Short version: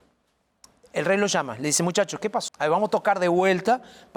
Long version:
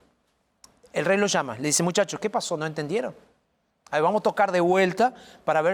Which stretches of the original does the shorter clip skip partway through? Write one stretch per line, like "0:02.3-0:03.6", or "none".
0:02.5-0:03.8